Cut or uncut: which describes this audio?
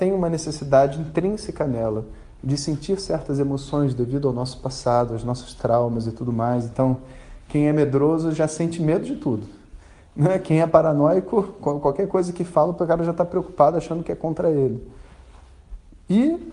uncut